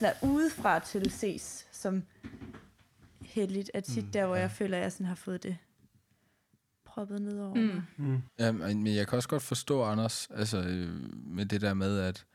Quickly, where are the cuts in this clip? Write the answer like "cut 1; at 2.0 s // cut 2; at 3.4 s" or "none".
cut 1; at 8.3 s

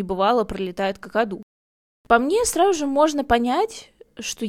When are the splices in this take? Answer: none

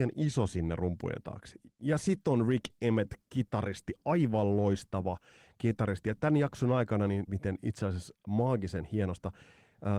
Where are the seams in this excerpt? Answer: cut 1; at 7.3 s

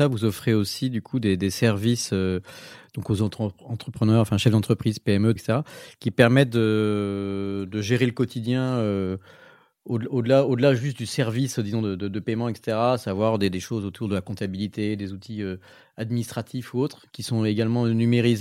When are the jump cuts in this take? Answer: cut 1; at 5.4 s

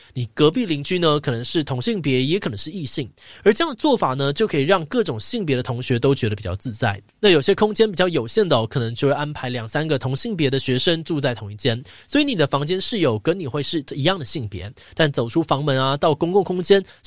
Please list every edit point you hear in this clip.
none

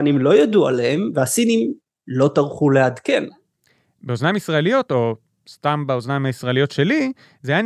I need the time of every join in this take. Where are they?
none

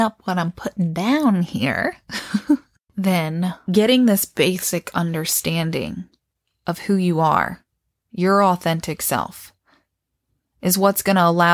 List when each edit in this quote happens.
none

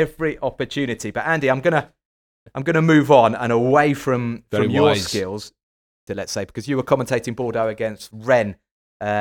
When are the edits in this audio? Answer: cut 1; at 6.1 s

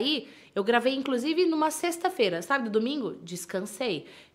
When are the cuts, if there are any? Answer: none

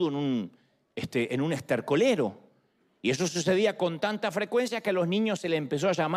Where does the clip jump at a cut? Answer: none

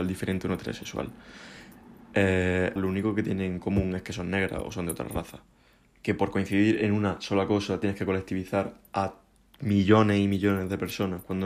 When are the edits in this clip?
cut 1; at 2.8 s // cut 2; at 6.0 s

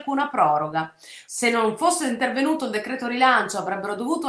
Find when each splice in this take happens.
cut 1; at 1.3 s

